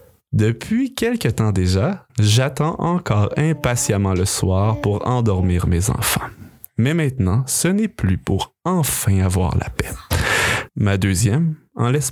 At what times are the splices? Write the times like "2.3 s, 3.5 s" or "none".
2.1 s, 10.7 s